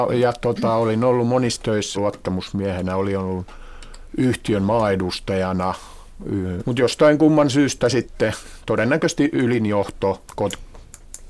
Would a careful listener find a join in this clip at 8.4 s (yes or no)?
no